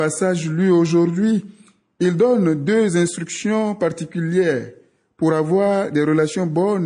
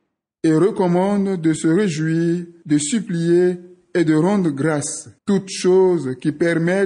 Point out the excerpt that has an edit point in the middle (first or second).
second